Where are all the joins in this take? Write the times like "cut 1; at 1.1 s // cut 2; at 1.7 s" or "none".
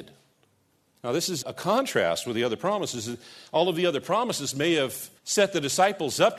cut 1; at 1.4 s // cut 2; at 5.2 s